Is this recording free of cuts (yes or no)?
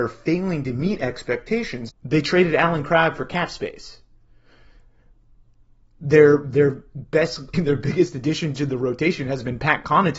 no